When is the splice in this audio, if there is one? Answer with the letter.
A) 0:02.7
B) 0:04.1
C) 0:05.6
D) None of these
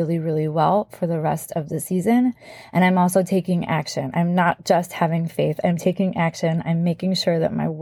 D